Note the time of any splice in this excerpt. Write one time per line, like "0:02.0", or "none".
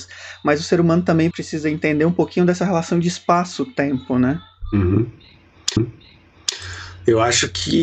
0:01.3